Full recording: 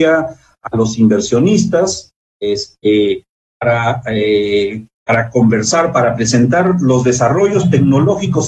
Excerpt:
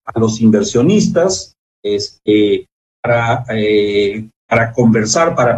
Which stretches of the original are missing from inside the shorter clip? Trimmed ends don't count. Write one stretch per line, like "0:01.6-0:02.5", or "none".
none